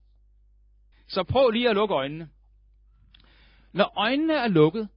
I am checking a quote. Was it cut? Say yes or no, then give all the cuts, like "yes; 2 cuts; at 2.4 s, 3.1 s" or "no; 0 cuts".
yes; 1 cut; at 0.9 s